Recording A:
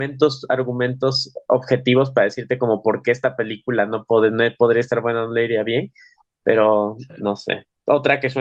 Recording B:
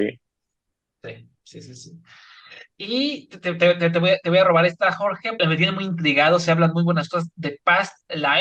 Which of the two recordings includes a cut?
B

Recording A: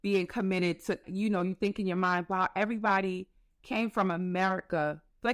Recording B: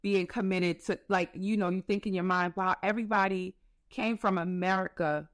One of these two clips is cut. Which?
A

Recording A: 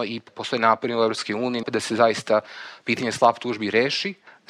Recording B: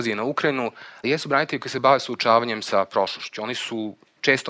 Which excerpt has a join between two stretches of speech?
A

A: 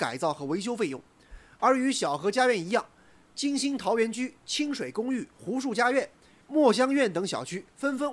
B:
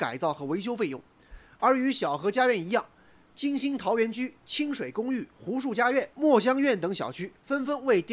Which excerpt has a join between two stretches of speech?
B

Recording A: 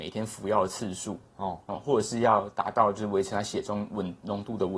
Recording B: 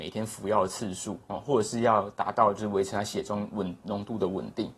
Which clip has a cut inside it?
B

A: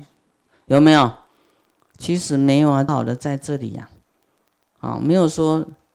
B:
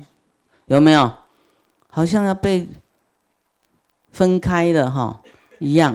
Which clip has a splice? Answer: A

